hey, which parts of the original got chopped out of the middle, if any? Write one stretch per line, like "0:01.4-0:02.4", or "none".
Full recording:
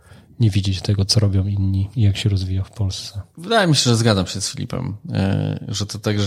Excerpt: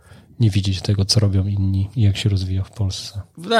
none